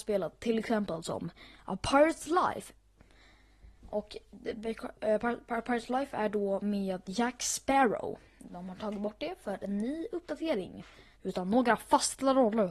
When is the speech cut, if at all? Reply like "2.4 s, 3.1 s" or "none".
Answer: 8.3 s, 11.1 s